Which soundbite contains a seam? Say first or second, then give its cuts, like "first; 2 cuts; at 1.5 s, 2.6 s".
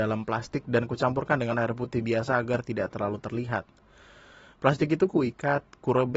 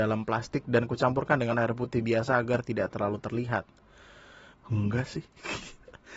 second; 1 cut; at 4.5 s